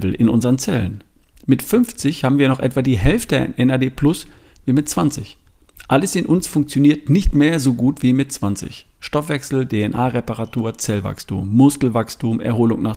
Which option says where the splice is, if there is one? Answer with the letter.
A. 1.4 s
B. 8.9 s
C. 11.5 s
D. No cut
D